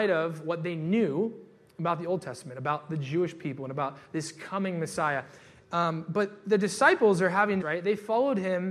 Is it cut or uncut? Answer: cut